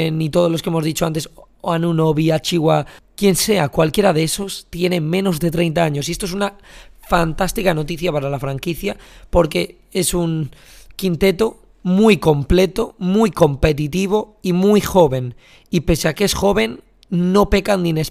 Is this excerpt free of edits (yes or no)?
yes